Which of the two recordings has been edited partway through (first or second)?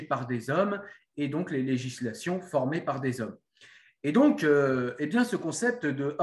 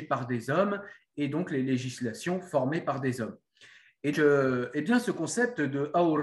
second